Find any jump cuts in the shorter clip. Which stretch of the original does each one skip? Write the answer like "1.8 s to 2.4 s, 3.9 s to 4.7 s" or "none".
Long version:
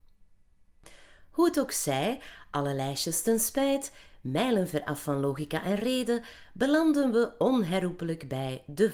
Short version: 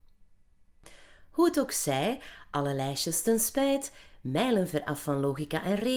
none